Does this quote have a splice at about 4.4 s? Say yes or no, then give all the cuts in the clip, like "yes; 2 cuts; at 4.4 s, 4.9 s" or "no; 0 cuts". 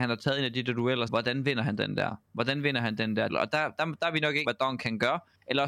yes; 3 cuts; at 1.1 s, 3.3 s, 4.4 s